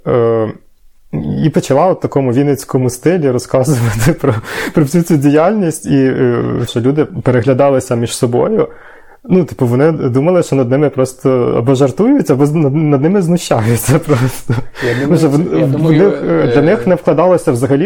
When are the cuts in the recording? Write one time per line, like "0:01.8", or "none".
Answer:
0:06.7